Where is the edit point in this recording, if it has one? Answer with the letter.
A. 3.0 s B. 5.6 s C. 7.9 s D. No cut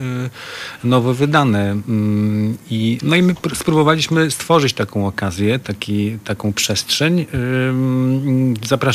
A